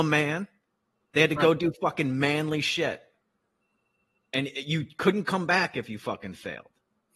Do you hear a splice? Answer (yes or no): no